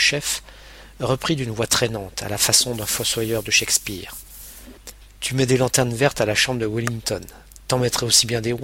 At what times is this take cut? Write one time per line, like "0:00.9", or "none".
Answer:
none